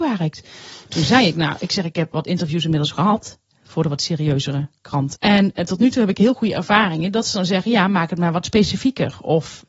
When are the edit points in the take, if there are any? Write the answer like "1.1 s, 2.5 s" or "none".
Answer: 5.2 s